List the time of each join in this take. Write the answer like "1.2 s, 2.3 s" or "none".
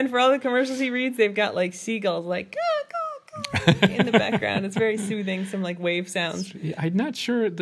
none